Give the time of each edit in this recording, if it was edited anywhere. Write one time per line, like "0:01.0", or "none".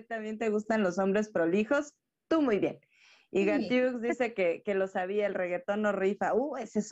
none